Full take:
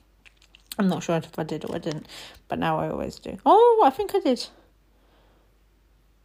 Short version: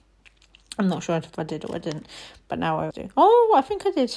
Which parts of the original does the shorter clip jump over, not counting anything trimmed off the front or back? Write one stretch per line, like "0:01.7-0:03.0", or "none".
0:02.9-0:03.2